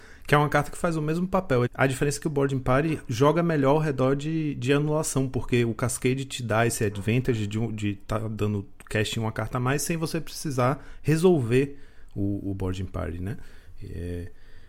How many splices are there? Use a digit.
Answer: 1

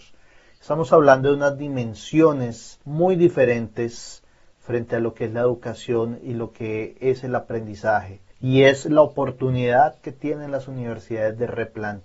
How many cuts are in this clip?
1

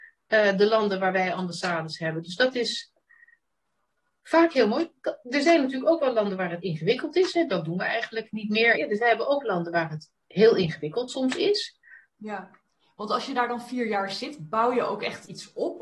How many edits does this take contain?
3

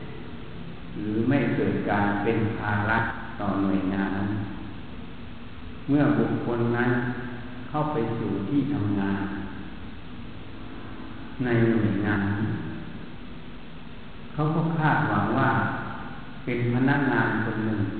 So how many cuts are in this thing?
2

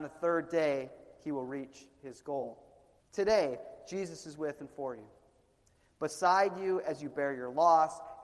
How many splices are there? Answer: 1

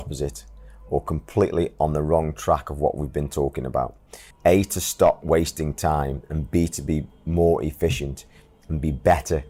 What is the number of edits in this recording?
1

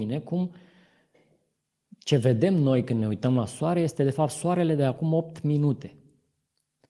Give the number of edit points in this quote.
0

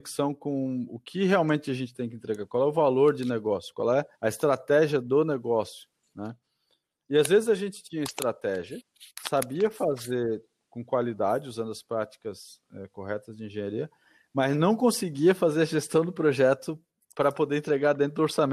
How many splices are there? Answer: 1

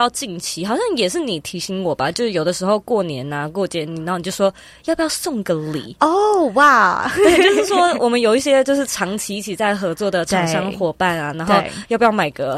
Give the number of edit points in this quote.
0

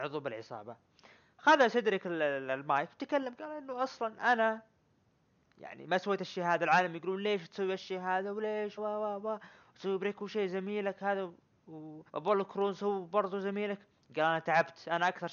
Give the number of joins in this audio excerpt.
2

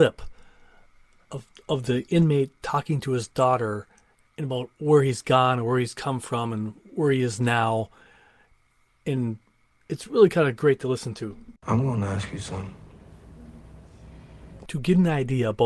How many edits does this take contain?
2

